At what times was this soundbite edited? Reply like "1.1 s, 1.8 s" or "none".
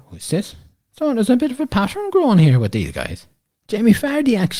3.5 s